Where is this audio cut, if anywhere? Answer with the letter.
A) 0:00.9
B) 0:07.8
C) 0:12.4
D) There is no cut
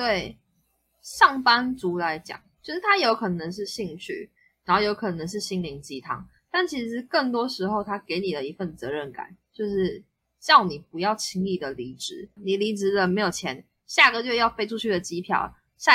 C